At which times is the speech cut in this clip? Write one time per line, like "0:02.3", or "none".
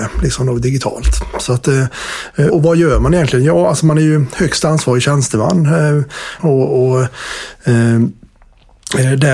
0:02.5
0:06.4